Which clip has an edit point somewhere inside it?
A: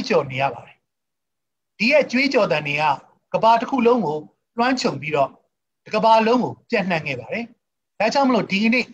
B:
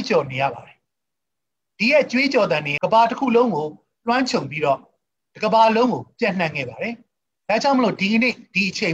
B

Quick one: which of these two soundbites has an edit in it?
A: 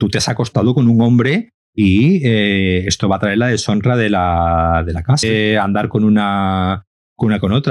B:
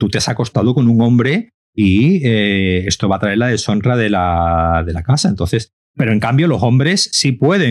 A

